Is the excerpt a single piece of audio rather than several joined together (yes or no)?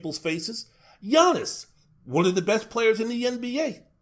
yes